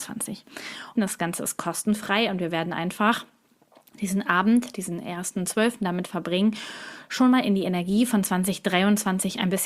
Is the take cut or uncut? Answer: cut